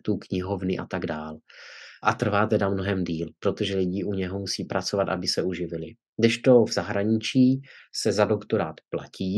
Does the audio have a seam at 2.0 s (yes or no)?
yes